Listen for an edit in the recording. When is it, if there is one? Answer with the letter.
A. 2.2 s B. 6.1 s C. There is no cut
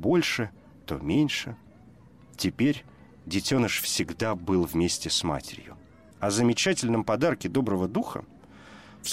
B